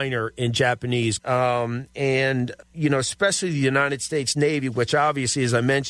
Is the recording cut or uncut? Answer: cut